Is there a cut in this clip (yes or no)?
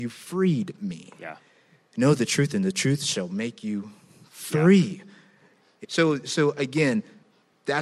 yes